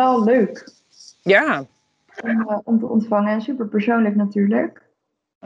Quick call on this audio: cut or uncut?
uncut